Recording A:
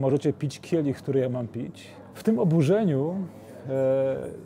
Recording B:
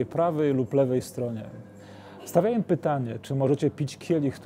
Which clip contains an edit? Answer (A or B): A